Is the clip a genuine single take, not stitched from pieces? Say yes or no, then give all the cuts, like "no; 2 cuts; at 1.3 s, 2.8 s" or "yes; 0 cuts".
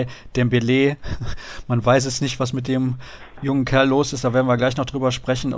yes; 0 cuts